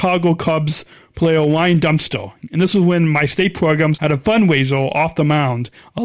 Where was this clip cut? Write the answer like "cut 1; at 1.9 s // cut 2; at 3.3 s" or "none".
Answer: cut 1; at 4.0 s